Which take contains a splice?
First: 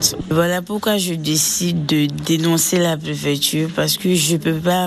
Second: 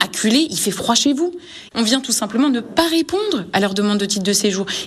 second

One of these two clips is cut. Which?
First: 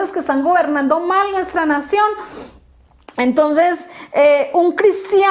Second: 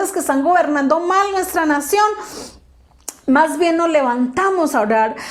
first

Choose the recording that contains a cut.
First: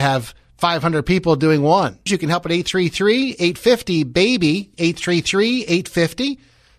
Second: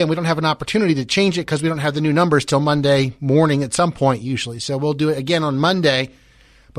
first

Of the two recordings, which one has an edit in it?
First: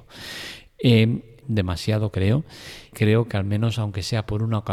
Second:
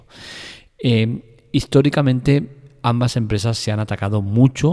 first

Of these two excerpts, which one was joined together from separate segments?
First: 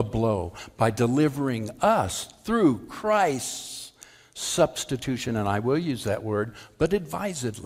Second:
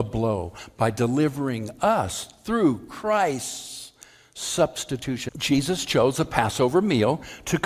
second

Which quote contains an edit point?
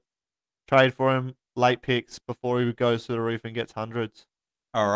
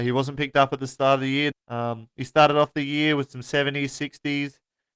second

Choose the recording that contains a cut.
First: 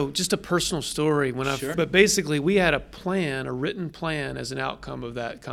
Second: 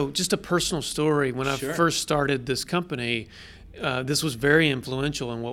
first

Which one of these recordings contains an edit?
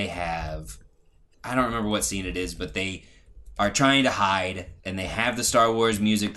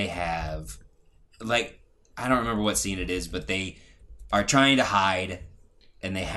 first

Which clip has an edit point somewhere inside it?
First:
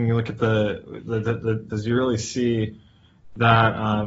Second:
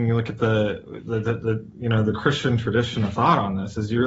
first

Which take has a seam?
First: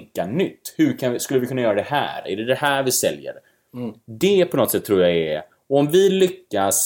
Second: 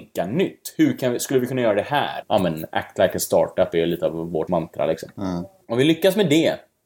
second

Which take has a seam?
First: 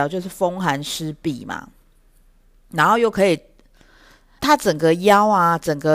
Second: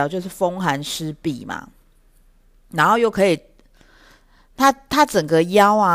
first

